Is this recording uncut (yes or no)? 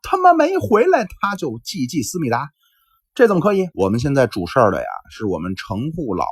no